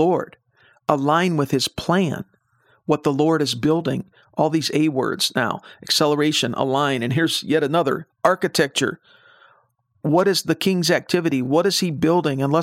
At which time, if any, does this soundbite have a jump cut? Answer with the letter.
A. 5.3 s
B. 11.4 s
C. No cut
C